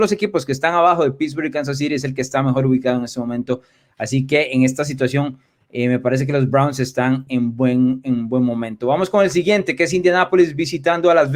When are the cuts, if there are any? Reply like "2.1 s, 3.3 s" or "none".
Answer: 7.3 s